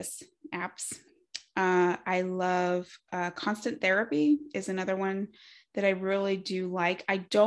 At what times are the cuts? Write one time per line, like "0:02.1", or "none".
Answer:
none